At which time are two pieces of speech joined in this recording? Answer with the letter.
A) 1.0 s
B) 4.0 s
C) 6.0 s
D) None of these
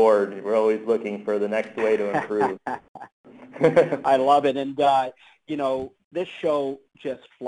C